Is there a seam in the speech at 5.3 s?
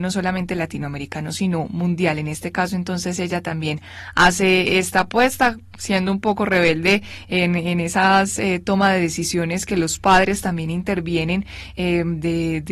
no; 0 cuts

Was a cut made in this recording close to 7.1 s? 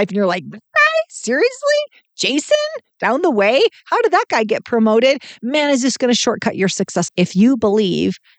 yes; 2 cuts; at 5.4 s, 7.1 s

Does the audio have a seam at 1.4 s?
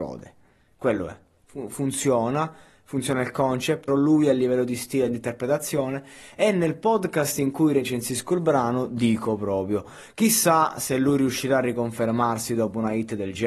no; 1 cut; at 3.9 s

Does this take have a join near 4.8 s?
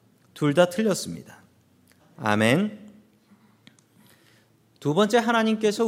no; 1 cut; at 2.0 s

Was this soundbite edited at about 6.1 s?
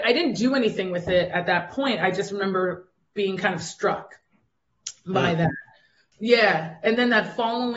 yes; 1 cut; at 6.1 s

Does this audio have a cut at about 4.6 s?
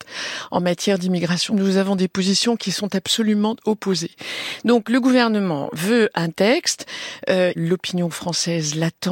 no; 2 cuts; at 1.5 s, 7.6 s

